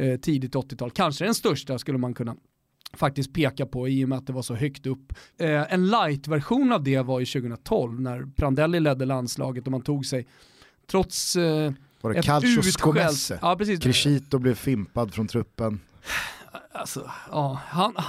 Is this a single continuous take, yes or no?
no